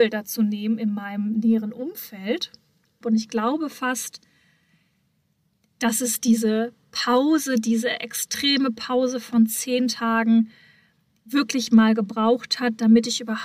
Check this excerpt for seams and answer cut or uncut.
cut